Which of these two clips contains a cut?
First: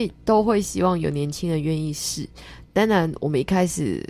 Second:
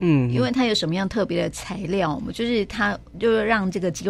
first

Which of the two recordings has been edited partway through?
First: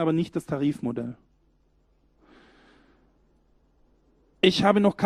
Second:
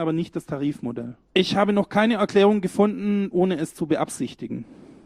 second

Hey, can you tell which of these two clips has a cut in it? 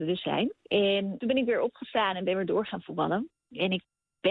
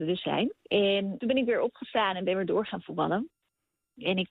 first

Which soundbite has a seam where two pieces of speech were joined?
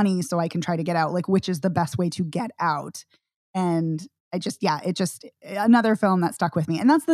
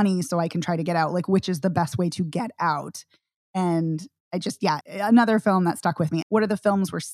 second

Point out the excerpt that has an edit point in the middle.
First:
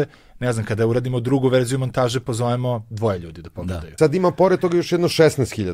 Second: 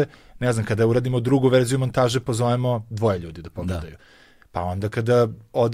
first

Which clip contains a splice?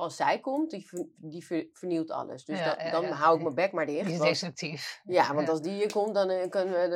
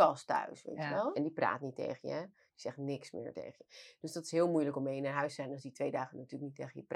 second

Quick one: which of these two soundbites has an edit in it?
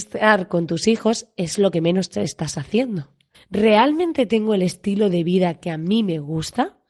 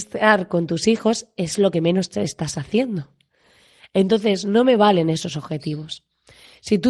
first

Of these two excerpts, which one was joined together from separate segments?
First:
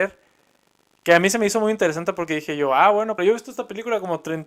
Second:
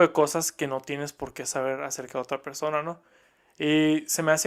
first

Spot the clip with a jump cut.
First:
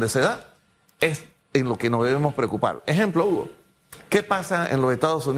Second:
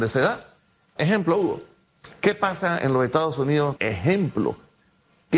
second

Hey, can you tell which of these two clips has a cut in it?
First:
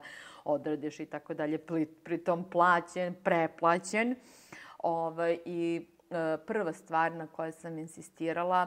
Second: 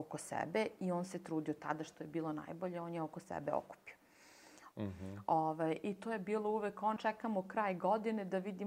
second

